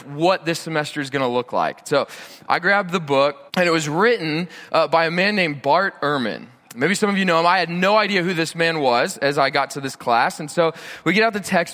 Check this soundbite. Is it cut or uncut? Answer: cut